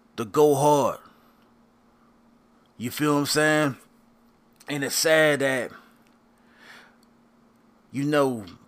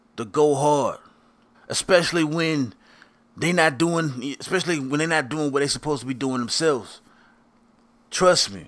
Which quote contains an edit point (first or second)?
second